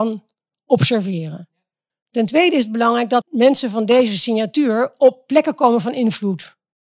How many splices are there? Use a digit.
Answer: 2